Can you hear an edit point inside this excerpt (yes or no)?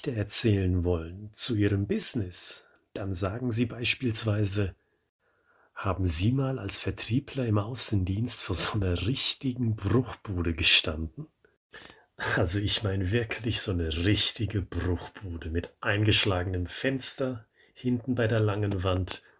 no